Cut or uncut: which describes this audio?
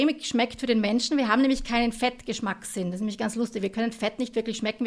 uncut